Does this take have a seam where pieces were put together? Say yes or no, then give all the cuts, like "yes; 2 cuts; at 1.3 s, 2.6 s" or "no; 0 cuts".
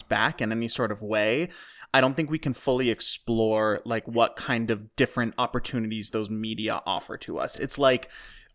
no; 0 cuts